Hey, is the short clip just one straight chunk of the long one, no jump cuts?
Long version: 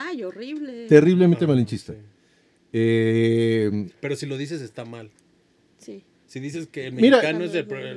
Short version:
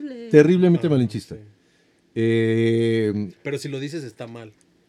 yes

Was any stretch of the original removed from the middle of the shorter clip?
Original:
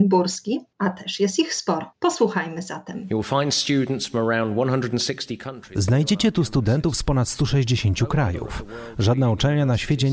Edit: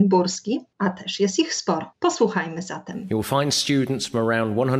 no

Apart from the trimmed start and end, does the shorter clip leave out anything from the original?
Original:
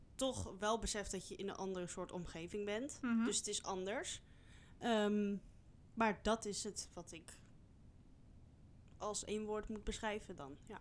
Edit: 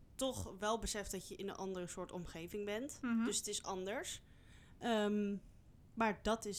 no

